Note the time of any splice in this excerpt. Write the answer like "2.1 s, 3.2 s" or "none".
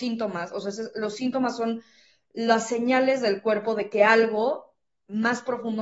none